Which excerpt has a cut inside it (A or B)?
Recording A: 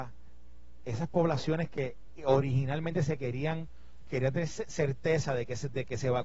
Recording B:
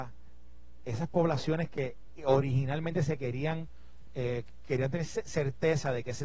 A